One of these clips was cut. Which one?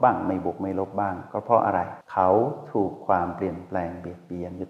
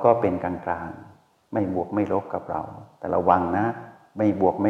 first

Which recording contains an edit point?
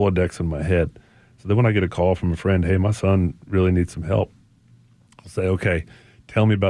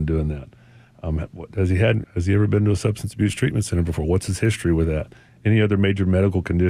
second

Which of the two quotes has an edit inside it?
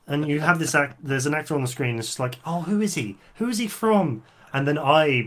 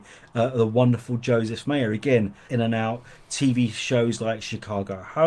second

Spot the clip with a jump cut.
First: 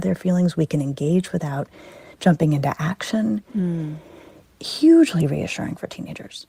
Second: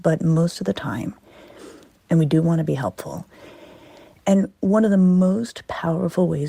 second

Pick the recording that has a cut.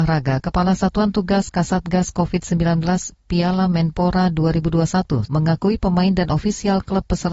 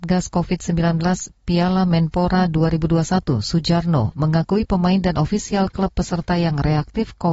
first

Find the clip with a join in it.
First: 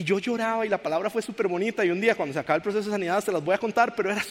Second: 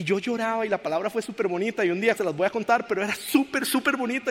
second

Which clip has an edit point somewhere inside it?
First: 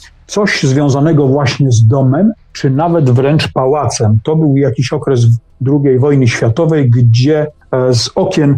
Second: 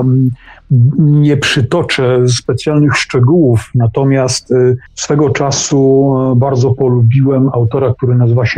second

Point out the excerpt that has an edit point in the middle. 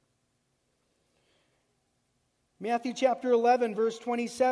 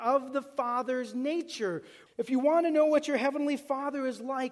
second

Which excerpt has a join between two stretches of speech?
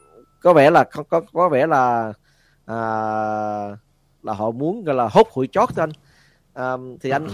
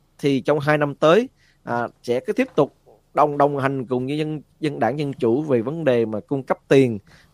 second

